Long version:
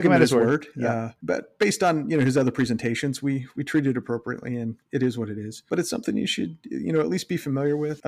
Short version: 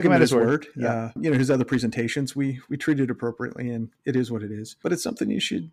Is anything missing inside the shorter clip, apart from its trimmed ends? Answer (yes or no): yes